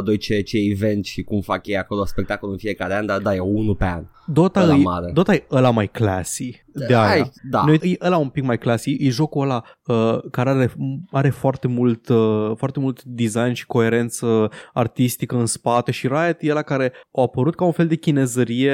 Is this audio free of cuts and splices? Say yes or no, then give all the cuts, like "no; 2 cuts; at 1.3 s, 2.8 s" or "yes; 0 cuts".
no; 1 cut; at 7.8 s